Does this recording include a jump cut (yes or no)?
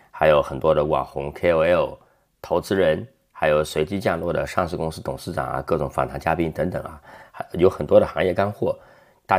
no